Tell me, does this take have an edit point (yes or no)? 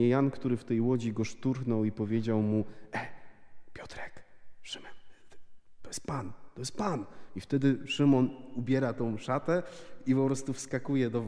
no